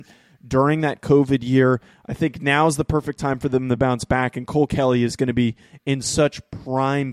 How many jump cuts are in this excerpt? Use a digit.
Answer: 0